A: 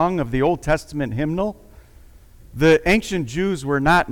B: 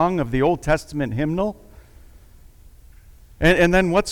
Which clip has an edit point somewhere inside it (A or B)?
A